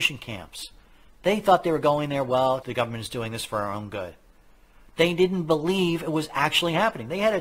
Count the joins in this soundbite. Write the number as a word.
one